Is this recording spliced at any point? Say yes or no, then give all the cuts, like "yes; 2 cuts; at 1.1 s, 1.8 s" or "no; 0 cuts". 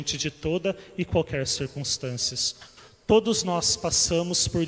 no; 0 cuts